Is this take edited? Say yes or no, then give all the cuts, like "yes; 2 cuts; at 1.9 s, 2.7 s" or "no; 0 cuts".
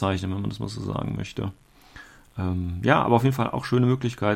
no; 0 cuts